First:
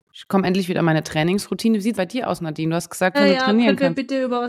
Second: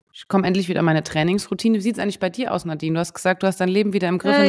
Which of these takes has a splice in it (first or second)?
first